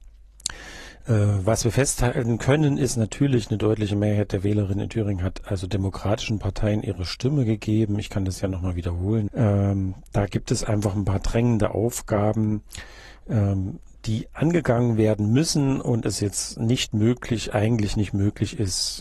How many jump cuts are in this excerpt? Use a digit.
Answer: 1